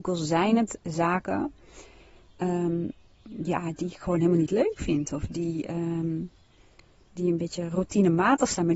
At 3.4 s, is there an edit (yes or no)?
no